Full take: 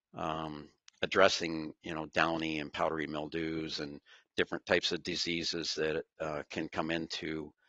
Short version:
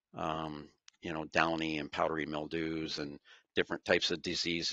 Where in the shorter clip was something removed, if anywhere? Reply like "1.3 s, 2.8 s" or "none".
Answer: 0.9 s